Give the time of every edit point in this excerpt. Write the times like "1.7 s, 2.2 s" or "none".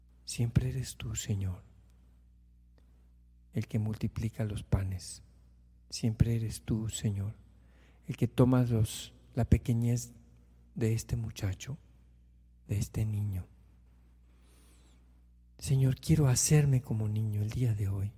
none